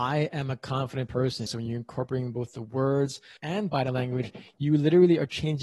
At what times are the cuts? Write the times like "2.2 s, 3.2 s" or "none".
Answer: 1.5 s, 3.4 s

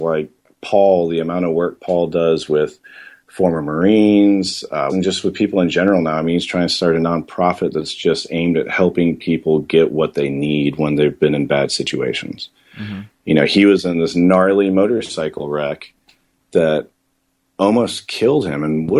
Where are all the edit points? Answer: 4.9 s

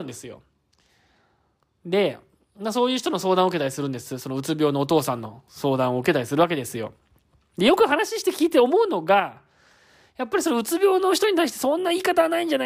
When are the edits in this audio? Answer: none

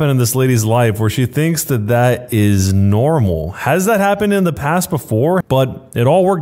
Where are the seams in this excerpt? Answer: 5.4 s

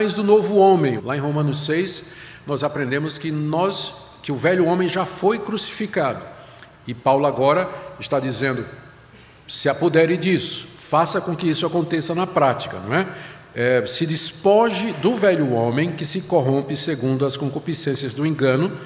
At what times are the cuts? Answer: 1.0 s

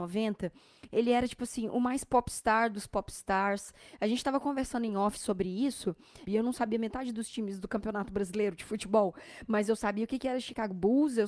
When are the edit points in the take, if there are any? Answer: 6.3 s

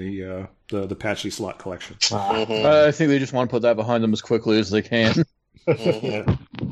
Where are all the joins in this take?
none

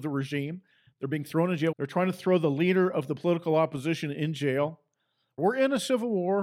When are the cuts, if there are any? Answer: 1.7 s, 5.4 s

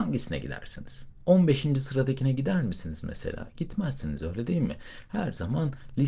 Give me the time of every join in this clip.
none

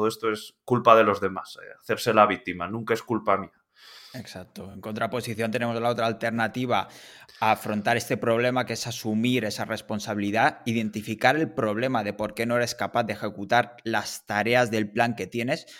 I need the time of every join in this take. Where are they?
none

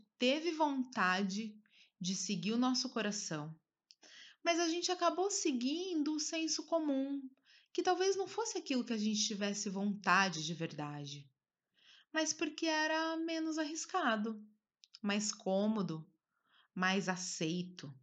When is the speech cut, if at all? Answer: none

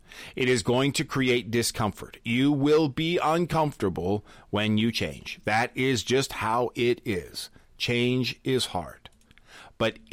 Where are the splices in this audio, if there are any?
none

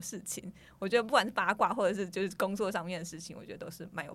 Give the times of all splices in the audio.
none

